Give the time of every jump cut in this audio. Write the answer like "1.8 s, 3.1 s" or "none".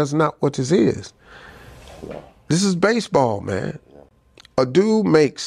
none